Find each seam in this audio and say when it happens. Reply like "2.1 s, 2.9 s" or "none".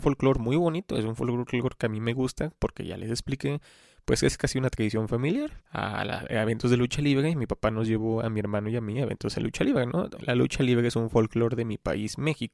5.6 s, 10.2 s

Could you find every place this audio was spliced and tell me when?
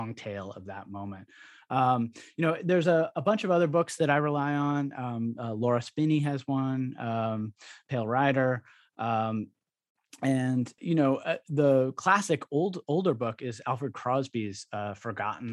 10.8 s

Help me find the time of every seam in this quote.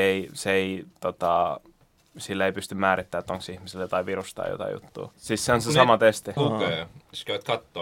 5.1 s, 6.4 s

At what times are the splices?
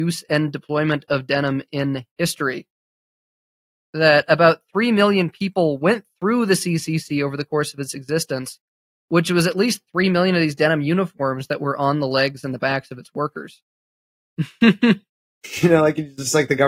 13.7 s

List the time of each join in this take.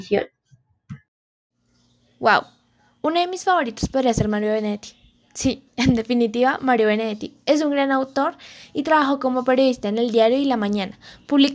none

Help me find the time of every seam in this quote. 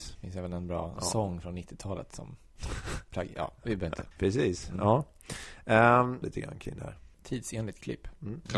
4.1 s, 6.2 s

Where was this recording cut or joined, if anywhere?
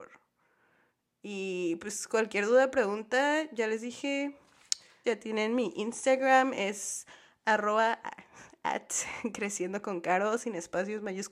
5.0 s

